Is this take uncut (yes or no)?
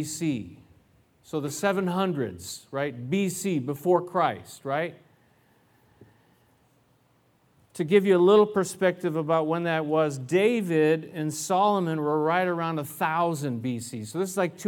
yes